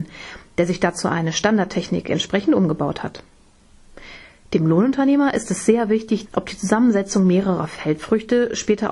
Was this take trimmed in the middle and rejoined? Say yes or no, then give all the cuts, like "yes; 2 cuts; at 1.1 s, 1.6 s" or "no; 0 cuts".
yes; 1 cut; at 6.2 s